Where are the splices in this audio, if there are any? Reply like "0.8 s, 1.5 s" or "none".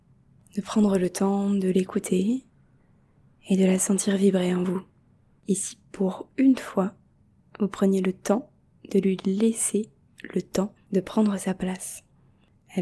5.4 s, 10.8 s